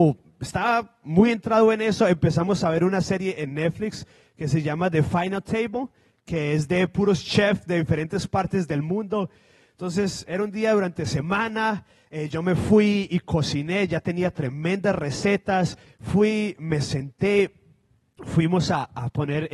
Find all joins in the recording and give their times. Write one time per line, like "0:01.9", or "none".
0:15.9